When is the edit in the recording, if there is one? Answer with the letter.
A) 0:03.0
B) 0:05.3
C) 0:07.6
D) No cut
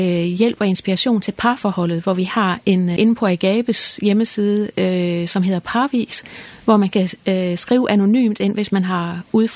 A